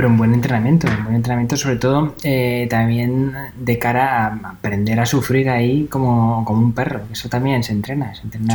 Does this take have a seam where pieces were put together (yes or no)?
no